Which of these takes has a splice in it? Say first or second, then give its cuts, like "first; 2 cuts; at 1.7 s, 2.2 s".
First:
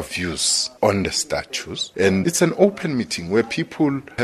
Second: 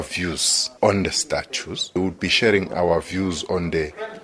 first; 1 cut; at 1.9 s